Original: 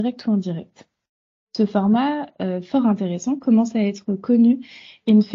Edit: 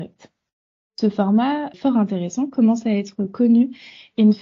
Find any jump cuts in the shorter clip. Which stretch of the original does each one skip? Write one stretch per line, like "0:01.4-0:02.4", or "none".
0:02.3-0:02.6